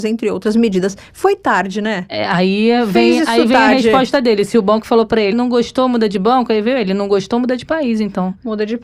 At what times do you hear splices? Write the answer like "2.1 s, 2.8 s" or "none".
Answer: 5.3 s